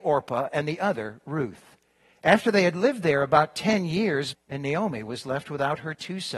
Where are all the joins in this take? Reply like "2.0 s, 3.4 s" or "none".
4.3 s